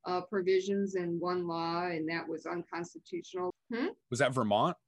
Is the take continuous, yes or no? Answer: no